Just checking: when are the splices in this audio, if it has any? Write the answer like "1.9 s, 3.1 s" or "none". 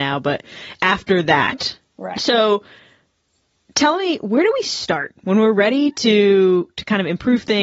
2.1 s